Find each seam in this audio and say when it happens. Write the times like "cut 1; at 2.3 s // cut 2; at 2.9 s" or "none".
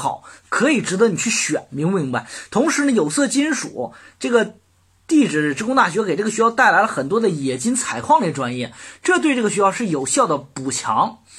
none